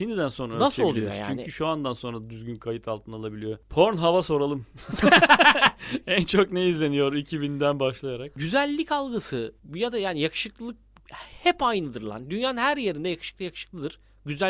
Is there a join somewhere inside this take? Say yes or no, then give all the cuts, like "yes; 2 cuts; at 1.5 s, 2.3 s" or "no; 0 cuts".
no; 0 cuts